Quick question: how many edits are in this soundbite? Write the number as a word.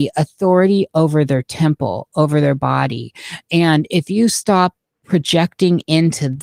one